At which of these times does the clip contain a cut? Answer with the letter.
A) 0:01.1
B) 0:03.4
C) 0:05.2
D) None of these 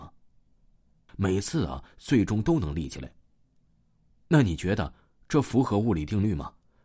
A